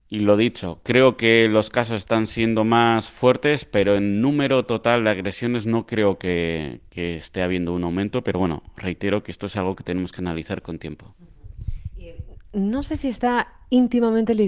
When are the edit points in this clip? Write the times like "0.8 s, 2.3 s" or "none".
none